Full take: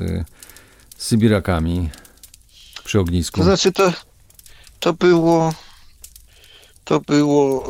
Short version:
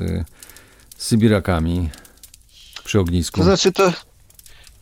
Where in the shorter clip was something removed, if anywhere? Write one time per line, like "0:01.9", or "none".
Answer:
none